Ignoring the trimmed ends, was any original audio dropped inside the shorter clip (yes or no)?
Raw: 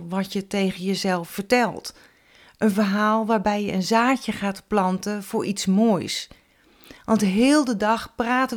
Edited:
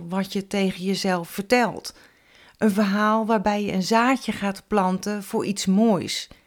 no